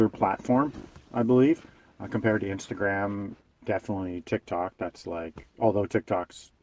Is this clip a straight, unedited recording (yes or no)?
yes